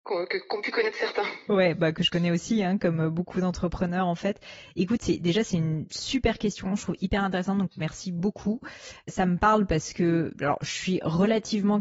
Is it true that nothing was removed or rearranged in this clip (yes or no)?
yes